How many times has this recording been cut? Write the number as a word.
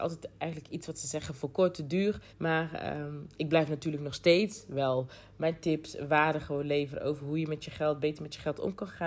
one